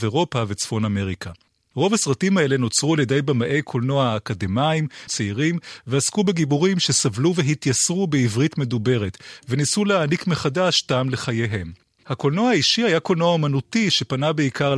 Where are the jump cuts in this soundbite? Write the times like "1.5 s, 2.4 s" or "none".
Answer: 5.1 s, 9.4 s